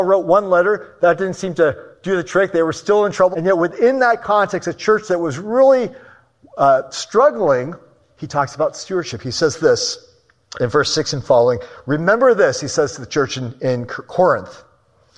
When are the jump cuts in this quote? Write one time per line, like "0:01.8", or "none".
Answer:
0:03.3

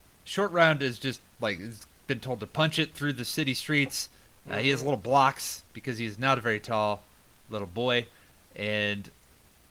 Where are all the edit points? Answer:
none

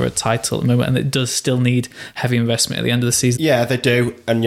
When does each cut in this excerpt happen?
0:03.4

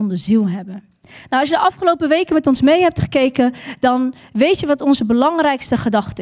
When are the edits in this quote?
none

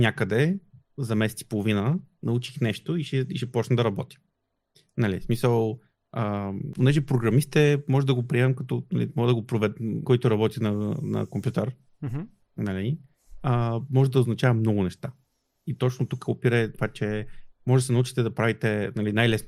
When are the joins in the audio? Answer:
0:10.0

